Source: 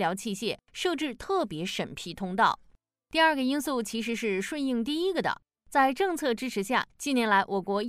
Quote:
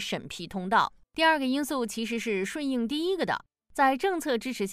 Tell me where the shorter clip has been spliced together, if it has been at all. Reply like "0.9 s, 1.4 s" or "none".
1.0 s